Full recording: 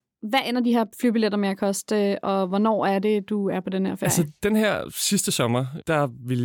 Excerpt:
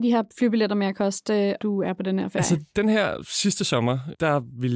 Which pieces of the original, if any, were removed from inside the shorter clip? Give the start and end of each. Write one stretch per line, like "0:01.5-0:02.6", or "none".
0:02.2-0:03.3

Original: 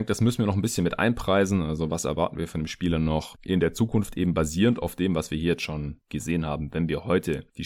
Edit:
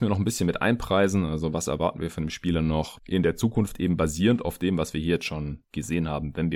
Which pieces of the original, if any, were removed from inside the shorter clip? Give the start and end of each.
none

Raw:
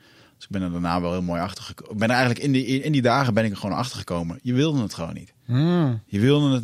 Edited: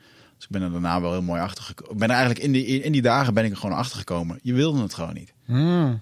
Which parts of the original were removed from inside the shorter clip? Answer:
none

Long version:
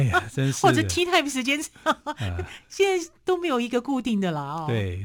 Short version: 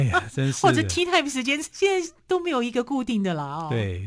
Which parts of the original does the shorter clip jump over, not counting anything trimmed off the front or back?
0:01.7-0:02.7

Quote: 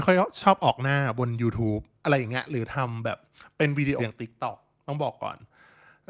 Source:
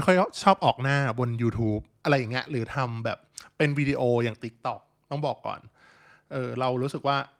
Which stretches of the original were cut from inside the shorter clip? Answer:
0:04.0-0:04.2

